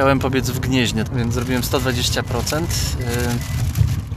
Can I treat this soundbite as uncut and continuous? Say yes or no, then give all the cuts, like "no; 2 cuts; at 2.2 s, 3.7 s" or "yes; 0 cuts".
no; 1 cut; at 1.1 s